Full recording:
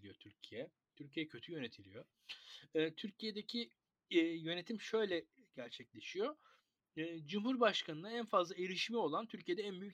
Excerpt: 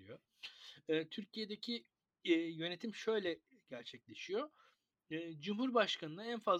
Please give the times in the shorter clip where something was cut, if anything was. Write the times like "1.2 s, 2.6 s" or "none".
none